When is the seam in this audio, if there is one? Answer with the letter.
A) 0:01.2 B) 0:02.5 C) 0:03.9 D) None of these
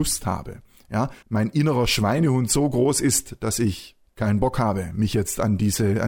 A